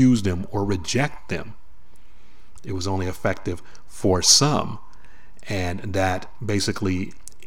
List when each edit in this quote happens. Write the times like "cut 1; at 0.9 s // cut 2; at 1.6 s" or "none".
cut 1; at 2.6 s